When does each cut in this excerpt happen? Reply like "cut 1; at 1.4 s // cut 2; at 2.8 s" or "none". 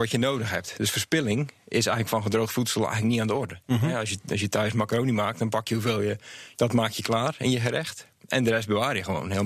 cut 1; at 6.5 s